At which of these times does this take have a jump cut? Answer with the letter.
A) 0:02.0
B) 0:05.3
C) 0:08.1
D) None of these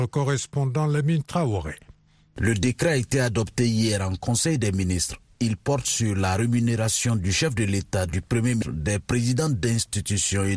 D